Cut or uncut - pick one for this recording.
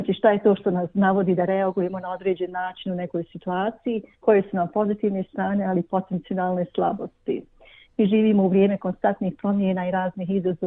cut